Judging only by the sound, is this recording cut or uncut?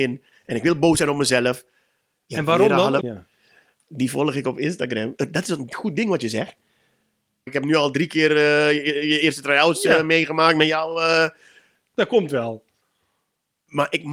cut